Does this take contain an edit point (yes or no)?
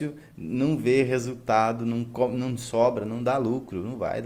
no